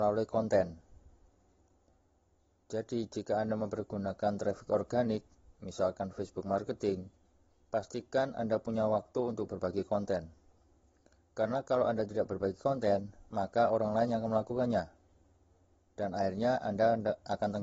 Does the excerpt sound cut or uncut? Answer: uncut